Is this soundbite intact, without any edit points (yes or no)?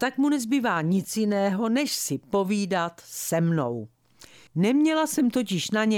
no